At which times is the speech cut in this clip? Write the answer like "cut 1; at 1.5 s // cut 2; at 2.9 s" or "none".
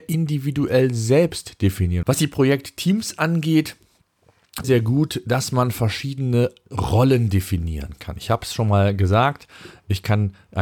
cut 1; at 2.0 s // cut 2; at 4.6 s